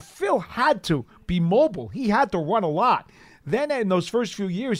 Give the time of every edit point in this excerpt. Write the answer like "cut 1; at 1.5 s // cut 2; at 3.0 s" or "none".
none